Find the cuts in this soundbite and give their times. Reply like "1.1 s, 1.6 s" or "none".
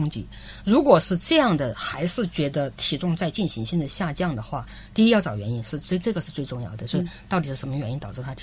none